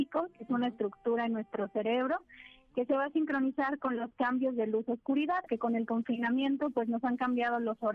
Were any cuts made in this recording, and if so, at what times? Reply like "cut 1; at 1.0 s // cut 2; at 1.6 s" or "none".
cut 1; at 5.5 s